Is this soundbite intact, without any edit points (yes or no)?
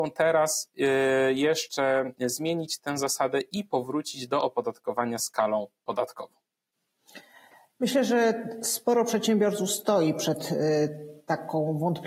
yes